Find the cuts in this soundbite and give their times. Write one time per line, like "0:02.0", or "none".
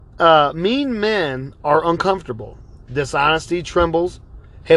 none